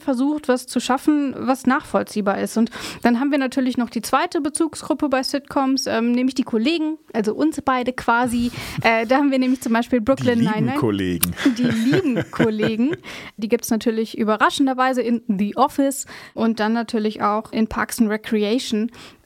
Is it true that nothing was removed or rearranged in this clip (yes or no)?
no